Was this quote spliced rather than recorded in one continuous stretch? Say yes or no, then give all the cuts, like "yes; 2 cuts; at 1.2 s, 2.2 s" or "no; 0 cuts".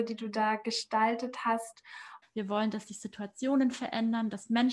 yes; 1 cut; at 2.2 s